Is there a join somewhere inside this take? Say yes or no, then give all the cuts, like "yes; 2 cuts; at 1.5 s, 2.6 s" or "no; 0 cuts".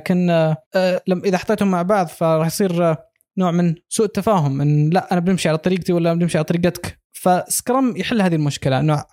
yes; 1 cut; at 7.0 s